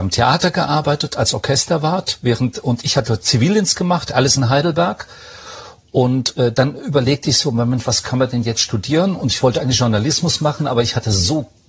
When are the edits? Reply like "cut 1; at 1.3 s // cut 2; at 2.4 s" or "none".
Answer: none